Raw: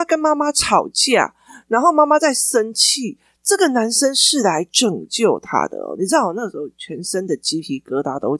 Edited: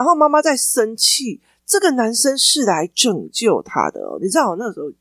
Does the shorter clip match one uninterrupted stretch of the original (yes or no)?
yes